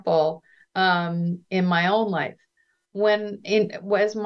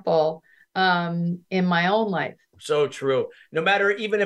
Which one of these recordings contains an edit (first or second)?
second